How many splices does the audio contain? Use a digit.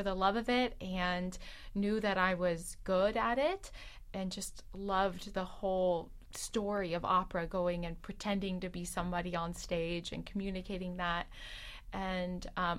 0